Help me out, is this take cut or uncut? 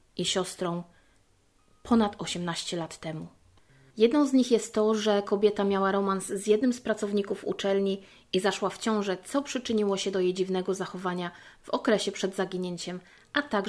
cut